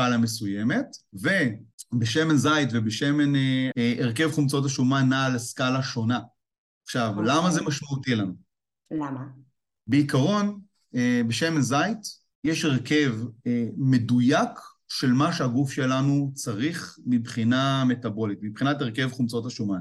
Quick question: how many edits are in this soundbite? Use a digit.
1